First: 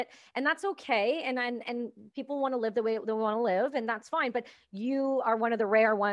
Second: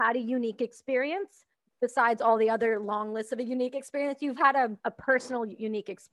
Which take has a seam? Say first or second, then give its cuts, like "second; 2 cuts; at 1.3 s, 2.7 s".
second; 1 cut; at 4.8 s